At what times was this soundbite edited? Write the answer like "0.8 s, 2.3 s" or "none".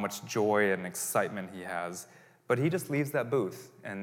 none